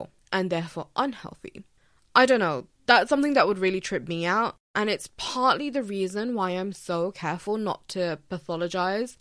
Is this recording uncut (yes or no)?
yes